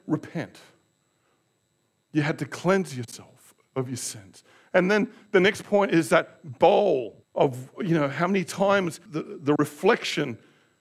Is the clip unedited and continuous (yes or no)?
no